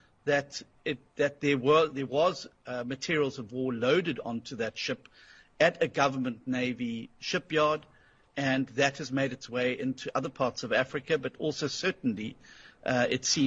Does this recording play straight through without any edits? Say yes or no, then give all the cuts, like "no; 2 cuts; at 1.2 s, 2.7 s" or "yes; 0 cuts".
yes; 0 cuts